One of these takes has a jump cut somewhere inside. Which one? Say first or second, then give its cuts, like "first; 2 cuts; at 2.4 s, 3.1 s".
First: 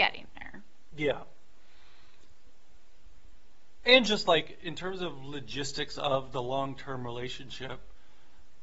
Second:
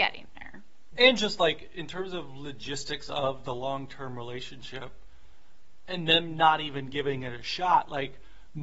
second; 1 cut; at 1.0 s